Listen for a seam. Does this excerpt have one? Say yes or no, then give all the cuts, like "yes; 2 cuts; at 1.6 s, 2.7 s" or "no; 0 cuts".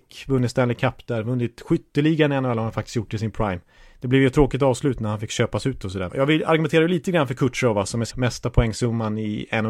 yes; 2 cuts; at 6.1 s, 8.1 s